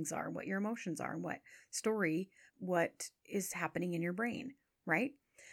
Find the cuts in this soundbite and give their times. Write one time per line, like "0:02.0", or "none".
0:02.5